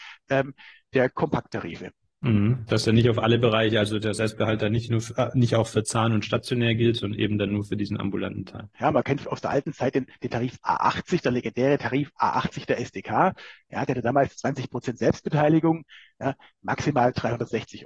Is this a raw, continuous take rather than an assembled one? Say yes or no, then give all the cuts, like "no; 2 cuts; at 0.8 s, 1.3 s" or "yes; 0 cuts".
no; 1 cut; at 8.7 s